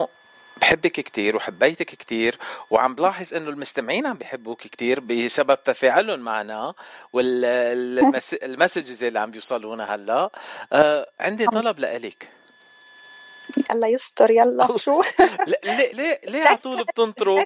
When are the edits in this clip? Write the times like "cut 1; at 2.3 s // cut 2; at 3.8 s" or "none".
cut 1; at 15.9 s